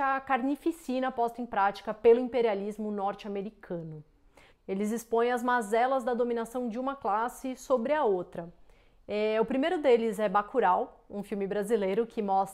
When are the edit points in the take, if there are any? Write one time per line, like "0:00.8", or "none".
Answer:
0:04.5